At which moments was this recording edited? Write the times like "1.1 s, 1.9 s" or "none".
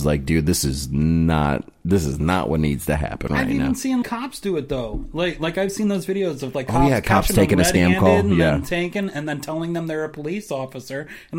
4.0 s